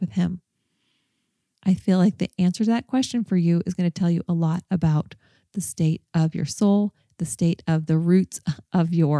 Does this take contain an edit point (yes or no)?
no